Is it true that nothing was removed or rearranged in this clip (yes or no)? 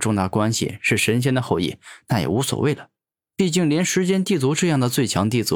yes